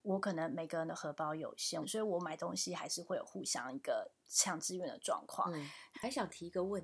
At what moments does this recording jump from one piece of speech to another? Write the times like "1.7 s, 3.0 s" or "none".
1.8 s, 5.9 s

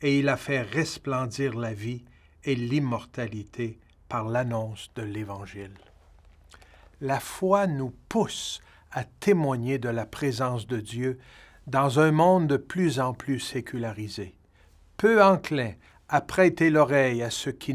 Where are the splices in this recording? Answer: none

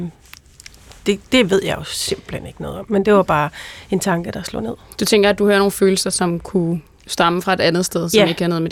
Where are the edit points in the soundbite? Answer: none

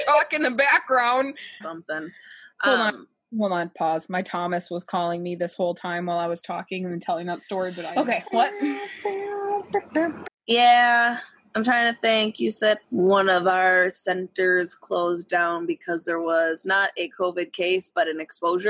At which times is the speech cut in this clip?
1.6 s, 10.2 s, 12.8 s

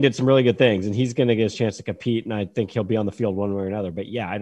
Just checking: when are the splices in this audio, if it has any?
none

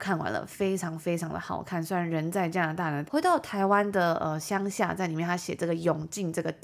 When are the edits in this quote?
3.1 s

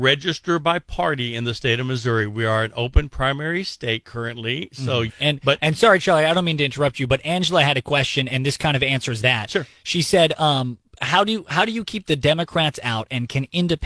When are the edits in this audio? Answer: 5.1 s

